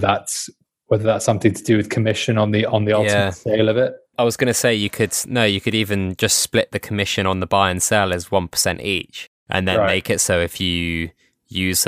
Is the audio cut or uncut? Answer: uncut